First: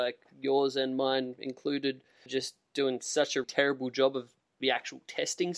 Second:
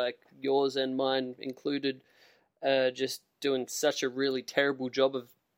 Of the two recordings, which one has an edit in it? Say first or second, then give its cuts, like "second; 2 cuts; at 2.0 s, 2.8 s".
first; 2 cuts; at 2.3 s, 3.4 s